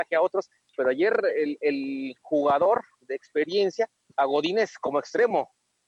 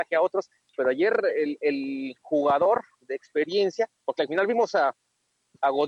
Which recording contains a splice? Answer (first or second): first